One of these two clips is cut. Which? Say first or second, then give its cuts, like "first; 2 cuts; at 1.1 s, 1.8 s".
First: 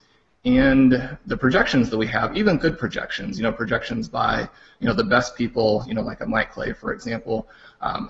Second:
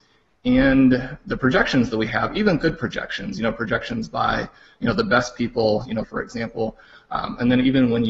second; 1 cut; at 6.0 s